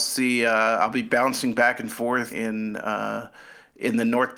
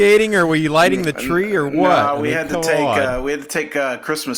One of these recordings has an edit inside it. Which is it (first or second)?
first